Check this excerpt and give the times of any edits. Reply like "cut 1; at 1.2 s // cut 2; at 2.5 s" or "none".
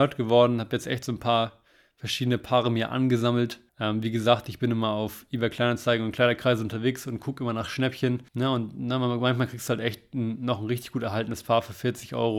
cut 1; at 3.7 s // cut 2; at 8.3 s